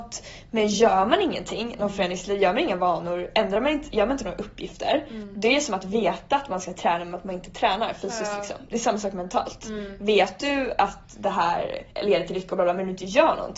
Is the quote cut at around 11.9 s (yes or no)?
yes